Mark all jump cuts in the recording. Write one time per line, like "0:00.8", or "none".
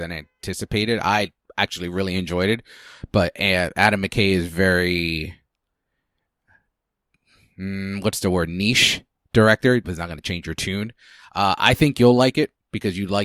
0:09.8